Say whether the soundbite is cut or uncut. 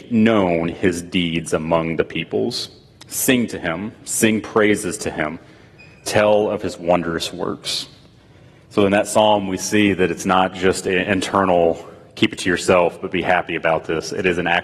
uncut